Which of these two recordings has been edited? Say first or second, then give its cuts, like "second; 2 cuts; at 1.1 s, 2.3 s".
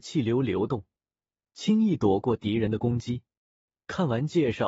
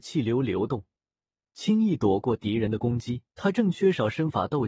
second; 1 cut; at 3.3 s